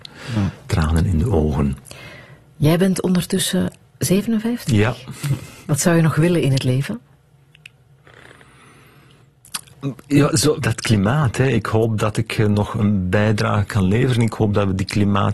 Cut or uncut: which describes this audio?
cut